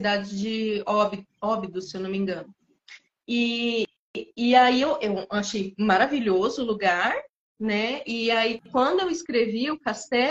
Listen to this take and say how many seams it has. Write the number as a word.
zero